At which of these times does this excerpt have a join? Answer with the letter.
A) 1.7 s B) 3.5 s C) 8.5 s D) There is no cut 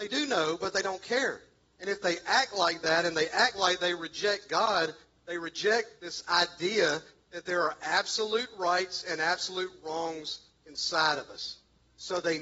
D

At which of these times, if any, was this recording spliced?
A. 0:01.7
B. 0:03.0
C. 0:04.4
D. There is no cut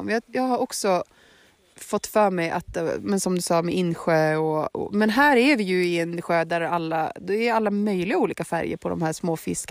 D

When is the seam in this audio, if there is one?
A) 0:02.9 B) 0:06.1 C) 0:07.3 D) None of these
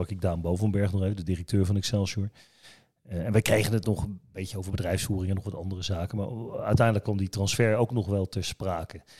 D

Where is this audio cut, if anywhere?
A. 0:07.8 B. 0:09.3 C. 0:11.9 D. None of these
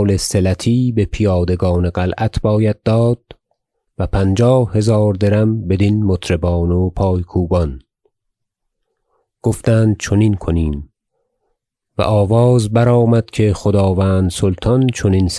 D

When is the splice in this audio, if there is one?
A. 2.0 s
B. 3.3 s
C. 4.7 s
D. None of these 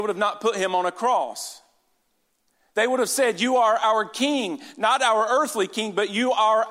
D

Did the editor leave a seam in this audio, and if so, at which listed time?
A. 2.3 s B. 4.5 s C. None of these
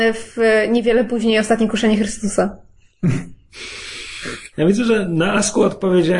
B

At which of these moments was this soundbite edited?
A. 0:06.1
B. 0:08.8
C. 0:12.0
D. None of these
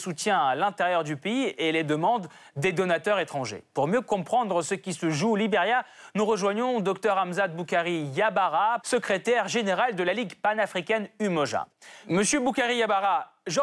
B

